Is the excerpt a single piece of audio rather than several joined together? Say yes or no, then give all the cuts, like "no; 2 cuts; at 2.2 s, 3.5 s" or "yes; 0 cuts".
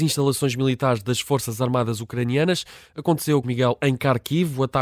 no; 1 cut; at 3.4 s